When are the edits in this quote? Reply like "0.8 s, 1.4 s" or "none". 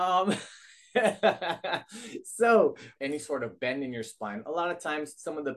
3.0 s